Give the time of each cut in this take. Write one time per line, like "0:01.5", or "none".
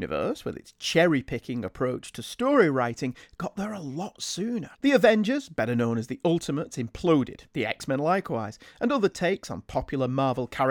0:04.7